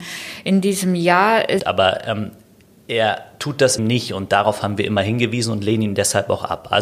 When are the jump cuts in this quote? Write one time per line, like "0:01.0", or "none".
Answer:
0:01.6
0:03.8